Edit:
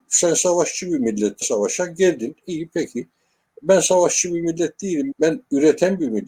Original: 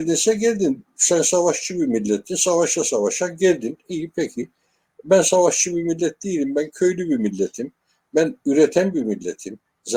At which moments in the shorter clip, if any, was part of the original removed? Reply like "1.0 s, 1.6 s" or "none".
1.4 s, 5.1 s